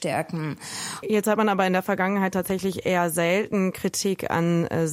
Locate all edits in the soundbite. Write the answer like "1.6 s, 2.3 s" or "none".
1.0 s